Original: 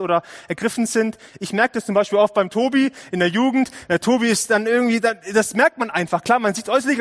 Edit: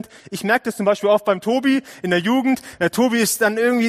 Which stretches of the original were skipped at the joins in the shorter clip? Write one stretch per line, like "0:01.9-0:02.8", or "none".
none